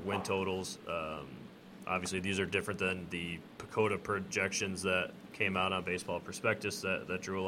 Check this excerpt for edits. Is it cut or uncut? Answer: uncut